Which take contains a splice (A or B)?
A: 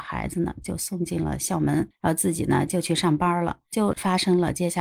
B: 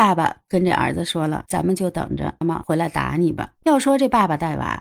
B